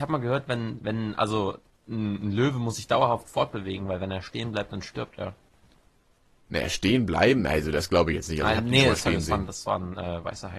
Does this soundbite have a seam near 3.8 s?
no; 0 cuts

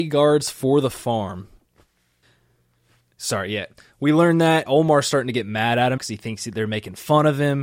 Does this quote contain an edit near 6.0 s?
yes; 2 cuts; at 4.7 s, 6.0 s

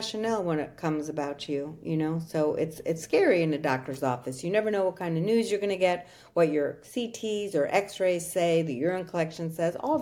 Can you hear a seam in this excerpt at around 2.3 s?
no; 0 cuts

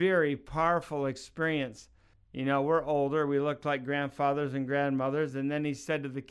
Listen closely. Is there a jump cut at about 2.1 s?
yes; 1 cut; at 2.1 s

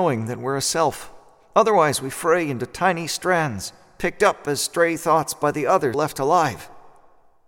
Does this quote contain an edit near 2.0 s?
no; 1 cut; at 5.9 s

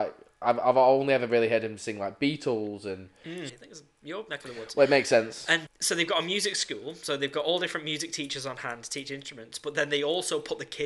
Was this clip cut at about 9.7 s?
no; 2 cuts; at 3.5 s, 5.7 s

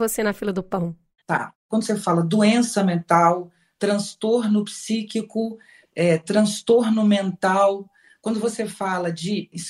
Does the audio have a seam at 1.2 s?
yes; 1 cut; at 1.2 s

